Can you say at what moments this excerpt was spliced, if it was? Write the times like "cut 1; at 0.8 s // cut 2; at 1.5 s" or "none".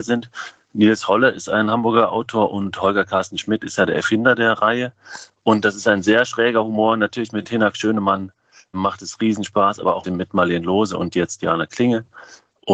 cut 1; at 8.7 s // cut 2; at 10.0 s